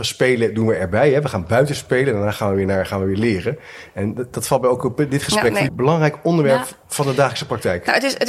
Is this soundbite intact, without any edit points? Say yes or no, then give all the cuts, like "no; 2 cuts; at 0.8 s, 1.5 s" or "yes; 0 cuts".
no; 1 cut; at 5.7 s